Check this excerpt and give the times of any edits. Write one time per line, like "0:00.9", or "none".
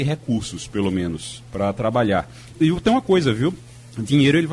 0:02.5